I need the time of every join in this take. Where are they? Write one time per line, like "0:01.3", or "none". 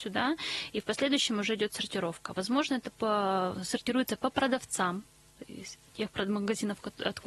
0:02.9